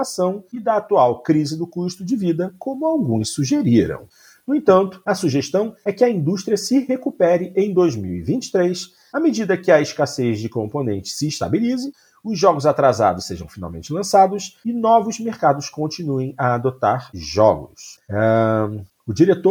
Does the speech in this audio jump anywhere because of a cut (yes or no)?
no